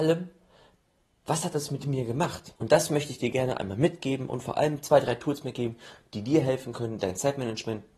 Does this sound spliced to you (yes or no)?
yes